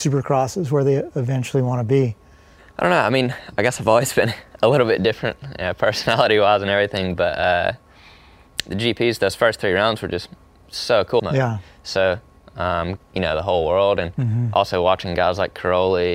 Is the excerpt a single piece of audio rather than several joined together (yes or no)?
no